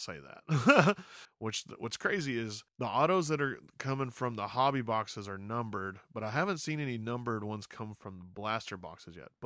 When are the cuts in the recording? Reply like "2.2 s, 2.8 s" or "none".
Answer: 1.3 s, 2.7 s